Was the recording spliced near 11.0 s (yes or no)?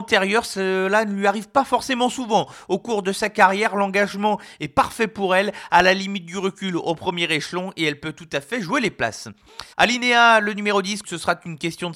yes